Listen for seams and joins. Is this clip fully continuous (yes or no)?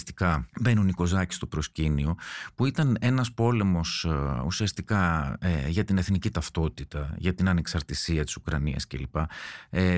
yes